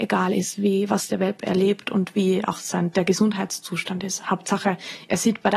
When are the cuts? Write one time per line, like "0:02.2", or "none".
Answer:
none